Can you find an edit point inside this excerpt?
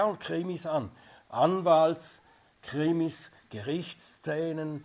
no; 0 cuts

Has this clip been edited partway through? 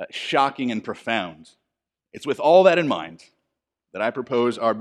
yes; 1 cut; at 2.0 s

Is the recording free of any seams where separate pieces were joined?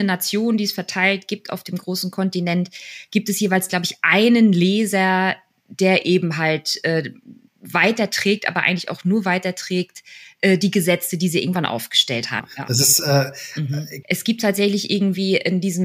no; 2 cuts; at 12.4 s, 14.0 s

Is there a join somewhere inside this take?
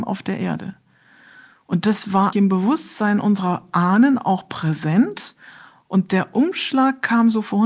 yes; 1 cut; at 2.3 s

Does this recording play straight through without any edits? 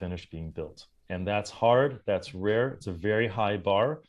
yes; 0 cuts

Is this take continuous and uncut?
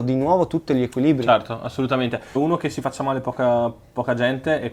no; 1 cut; at 2.4 s

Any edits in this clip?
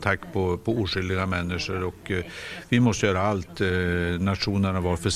no; 0 cuts

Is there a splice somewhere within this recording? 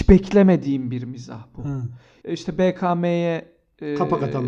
yes; 1 cut; at 2.2 s

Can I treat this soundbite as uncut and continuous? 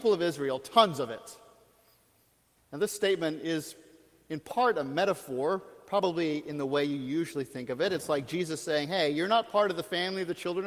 no; 1 cut; at 2.6 s

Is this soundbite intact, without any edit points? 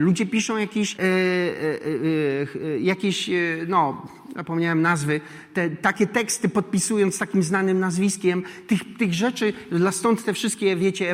no; 1 cut; at 0.9 s

